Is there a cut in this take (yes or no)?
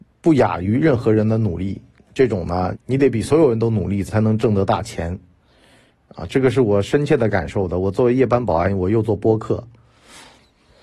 yes